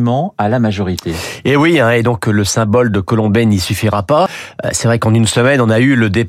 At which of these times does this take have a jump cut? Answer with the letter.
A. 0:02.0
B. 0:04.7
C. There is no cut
C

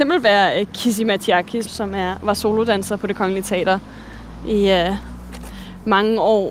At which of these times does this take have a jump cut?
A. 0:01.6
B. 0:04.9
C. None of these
A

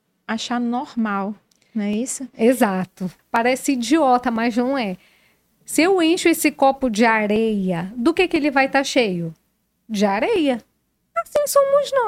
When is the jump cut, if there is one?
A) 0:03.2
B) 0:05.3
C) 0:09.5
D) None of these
A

